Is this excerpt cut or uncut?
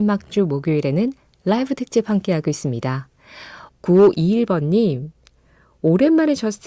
cut